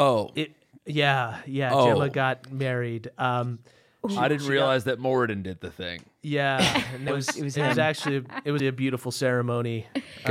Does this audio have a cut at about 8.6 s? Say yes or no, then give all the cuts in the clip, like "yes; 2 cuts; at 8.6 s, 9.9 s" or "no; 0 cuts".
yes; 2 cuts; at 7.1 s, 8.6 s